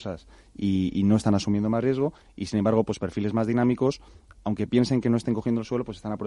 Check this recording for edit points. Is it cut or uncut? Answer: uncut